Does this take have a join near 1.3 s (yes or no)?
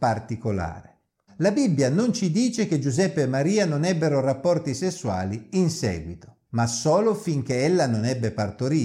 yes